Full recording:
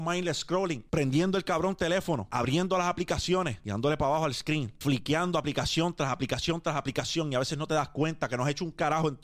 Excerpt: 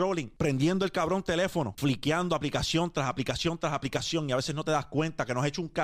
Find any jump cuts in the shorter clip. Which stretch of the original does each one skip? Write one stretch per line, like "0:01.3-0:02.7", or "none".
0:02.3-0:04.8